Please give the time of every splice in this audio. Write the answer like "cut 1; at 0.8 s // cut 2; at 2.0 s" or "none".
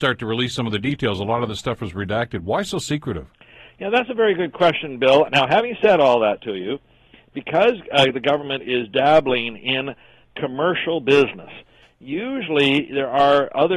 cut 1; at 5.3 s